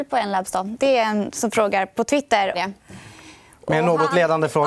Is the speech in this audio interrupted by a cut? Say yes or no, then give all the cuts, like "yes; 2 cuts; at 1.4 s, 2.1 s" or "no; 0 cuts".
yes; 1 cut; at 2.5 s